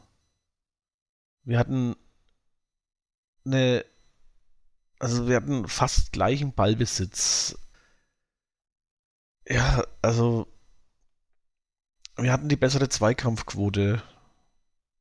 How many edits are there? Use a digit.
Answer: 0